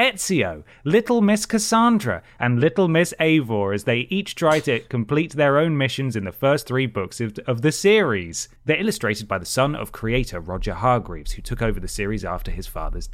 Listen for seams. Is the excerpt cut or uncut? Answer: cut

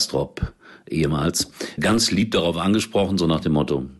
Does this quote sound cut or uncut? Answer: cut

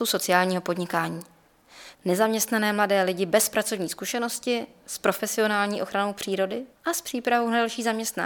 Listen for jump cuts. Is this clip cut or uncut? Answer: cut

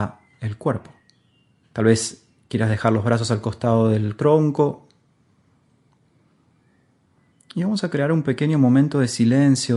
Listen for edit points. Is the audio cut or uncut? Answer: cut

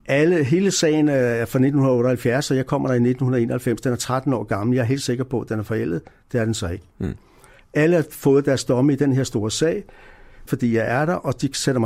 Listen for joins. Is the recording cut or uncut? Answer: cut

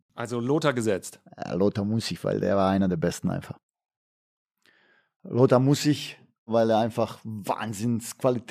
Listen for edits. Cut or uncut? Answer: uncut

